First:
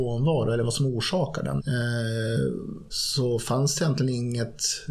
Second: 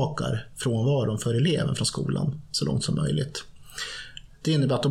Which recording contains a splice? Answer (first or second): first